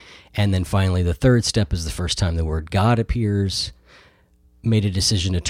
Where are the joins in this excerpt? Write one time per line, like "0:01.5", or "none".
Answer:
none